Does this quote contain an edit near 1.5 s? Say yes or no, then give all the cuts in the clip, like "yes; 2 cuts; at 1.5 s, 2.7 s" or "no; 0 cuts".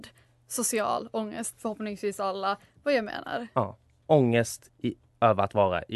yes; 1 cut; at 1.5 s